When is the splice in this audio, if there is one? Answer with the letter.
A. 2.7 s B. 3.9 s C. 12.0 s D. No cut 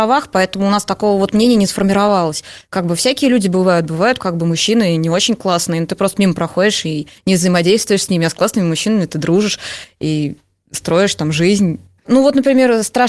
C